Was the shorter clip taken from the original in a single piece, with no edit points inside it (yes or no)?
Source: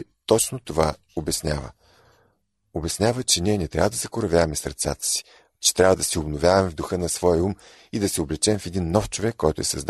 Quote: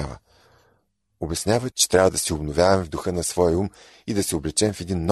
no